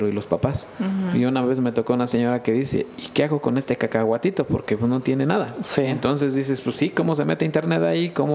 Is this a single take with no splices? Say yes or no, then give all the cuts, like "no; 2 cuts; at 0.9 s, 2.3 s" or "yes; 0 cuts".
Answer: yes; 0 cuts